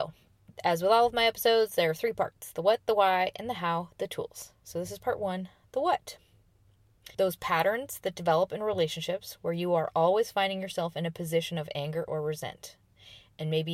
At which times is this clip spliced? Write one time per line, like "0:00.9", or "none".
0:07.1